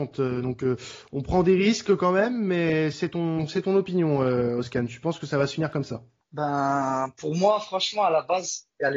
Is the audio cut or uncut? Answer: uncut